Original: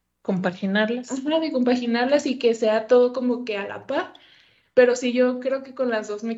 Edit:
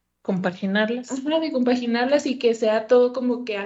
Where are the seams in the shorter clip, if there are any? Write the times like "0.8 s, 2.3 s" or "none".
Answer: none